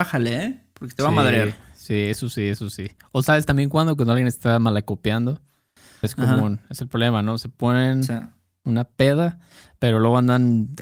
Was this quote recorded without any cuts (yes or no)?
no